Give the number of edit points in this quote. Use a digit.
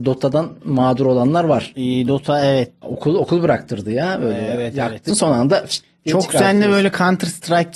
2